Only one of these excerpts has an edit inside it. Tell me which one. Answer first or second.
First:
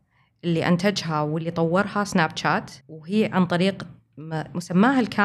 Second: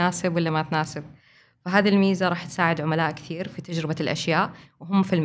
first